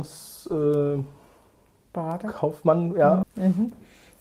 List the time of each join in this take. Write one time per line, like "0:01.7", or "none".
0:03.2

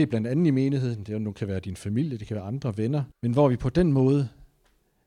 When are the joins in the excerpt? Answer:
0:03.1

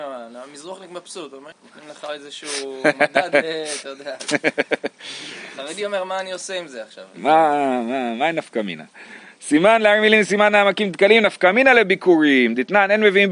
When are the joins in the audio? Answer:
0:01.5

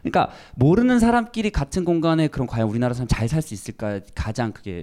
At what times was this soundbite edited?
none

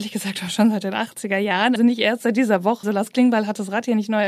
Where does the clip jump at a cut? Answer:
0:01.8
0:02.8

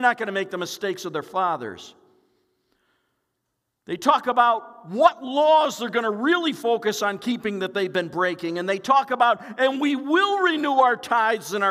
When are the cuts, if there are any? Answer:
none

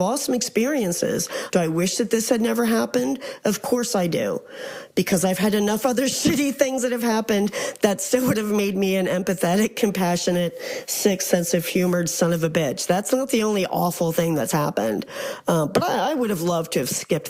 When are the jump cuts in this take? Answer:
0:01.5

